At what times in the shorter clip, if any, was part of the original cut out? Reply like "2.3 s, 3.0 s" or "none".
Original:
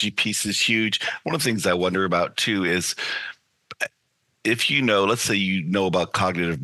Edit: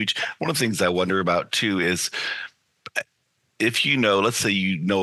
none